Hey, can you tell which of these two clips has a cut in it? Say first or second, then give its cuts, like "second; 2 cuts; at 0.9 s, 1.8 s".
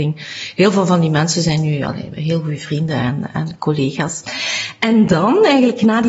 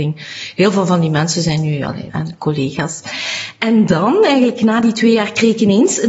second; 1 cut; at 2.1 s